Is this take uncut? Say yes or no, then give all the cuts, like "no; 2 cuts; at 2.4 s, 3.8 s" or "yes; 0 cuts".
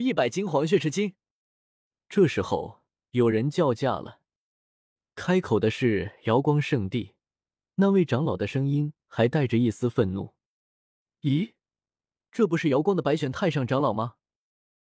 yes; 0 cuts